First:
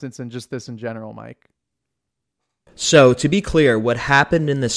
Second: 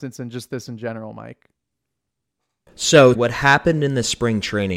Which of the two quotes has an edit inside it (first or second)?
second